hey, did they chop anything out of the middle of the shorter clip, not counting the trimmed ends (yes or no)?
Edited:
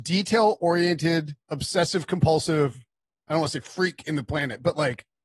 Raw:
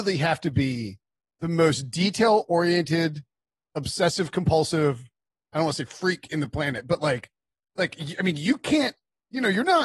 yes